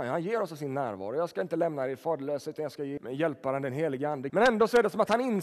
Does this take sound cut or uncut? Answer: cut